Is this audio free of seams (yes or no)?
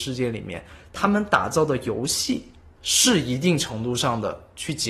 no